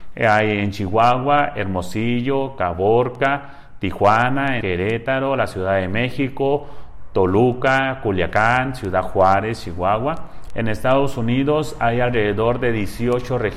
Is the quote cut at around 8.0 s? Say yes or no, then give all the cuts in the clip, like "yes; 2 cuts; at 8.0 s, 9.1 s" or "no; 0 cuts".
no; 2 cuts; at 4.6 s, 10.5 s